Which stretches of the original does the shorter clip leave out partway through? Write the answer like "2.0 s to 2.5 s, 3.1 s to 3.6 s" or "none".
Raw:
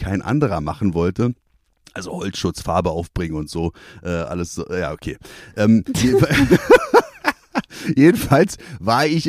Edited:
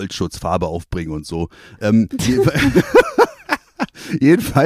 4.0 s to 5.5 s